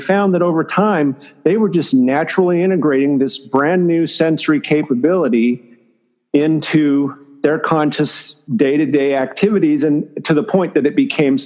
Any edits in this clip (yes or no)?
yes